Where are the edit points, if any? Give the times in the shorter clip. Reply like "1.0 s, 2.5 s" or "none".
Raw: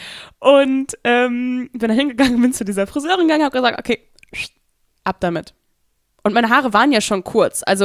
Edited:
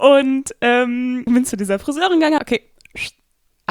1.3 s, 2.4 s